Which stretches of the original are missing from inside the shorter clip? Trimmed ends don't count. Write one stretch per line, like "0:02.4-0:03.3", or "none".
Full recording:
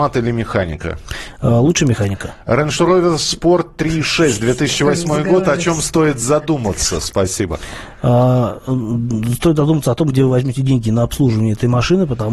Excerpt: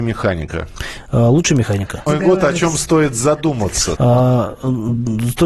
0:02.4-0:05.1
0:07.0-0:08.0